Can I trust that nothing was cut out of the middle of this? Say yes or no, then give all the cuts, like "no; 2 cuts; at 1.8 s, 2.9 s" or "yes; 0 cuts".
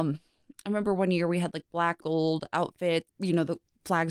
no; 2 cuts; at 2.0 s, 3.1 s